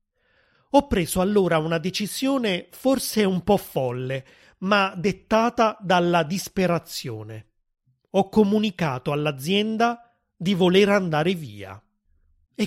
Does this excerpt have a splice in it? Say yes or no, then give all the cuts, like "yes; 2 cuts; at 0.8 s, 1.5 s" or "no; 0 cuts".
no; 0 cuts